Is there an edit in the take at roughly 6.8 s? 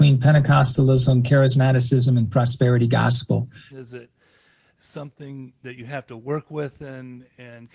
no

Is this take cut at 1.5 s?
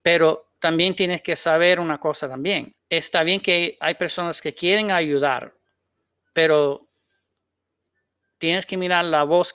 no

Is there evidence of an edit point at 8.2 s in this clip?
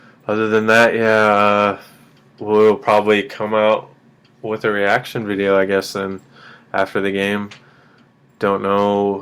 no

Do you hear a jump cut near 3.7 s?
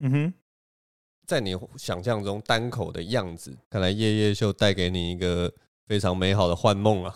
yes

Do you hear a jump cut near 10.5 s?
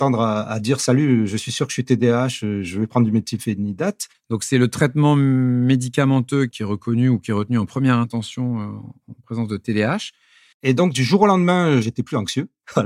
yes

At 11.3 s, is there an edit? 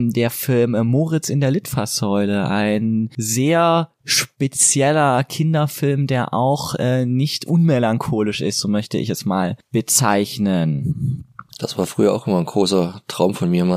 no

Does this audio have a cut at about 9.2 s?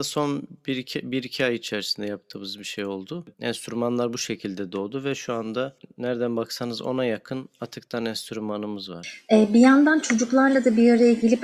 no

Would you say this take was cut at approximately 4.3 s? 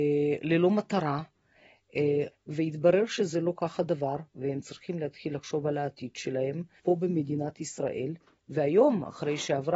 yes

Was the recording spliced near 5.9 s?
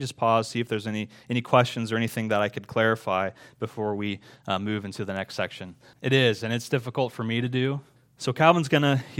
yes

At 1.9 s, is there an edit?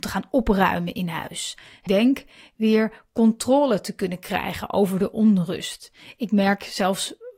yes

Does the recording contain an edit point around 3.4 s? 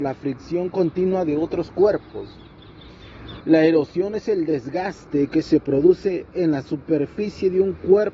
yes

